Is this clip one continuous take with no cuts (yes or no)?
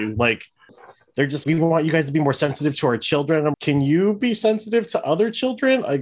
no